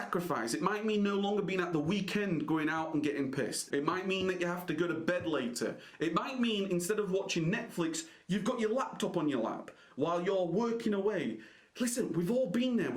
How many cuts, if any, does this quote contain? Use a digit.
1